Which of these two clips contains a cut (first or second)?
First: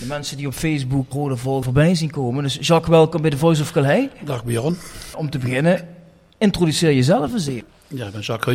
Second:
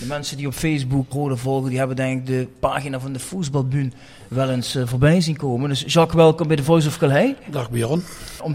first